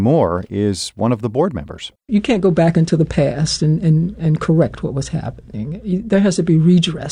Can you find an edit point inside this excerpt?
no; 0 cuts

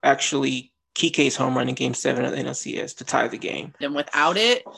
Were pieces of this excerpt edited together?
yes; 1 cut; at 3.8 s

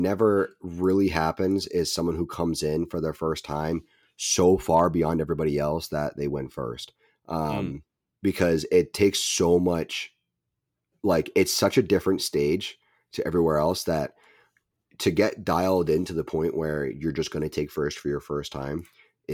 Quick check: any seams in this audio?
no; 0 cuts

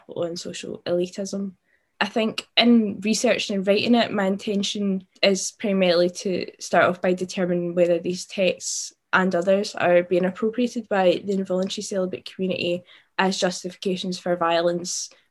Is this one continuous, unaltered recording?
no; 3 cuts; at 1.9 s, 5.2 s, 9.1 s

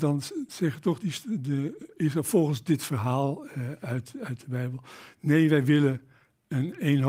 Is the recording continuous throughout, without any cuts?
yes; 0 cuts

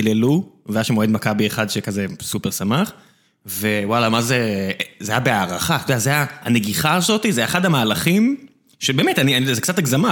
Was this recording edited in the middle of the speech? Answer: no; 0 cuts

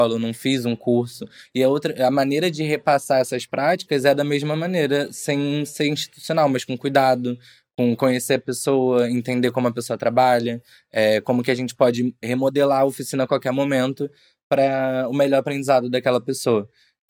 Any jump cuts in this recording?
no; 0 cuts

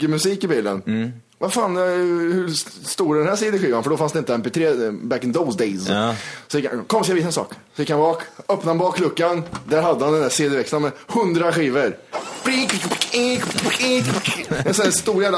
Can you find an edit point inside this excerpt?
no; 0 cuts

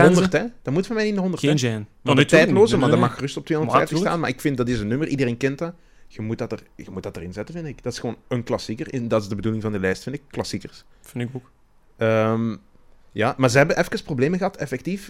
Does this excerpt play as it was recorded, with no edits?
yes; 0 cuts

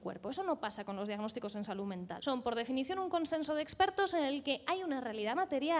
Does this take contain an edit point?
yes; 1 cut; at 2.2 s

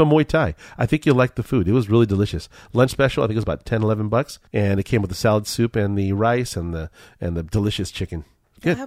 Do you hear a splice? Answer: yes; 1 cut; at 4.5 s

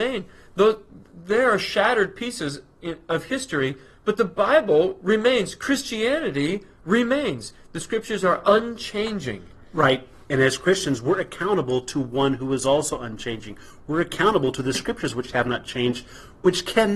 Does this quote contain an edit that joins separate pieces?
no; 0 cuts

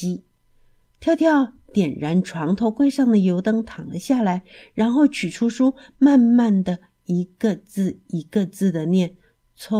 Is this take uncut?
yes; 0 cuts

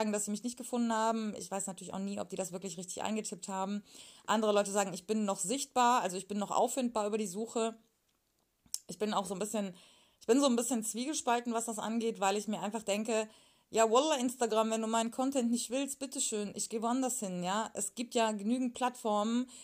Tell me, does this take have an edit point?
no; 0 cuts

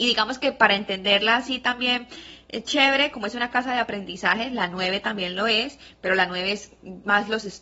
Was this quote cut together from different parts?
no; 0 cuts

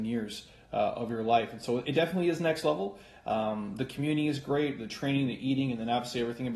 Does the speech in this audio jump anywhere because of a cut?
no; 0 cuts

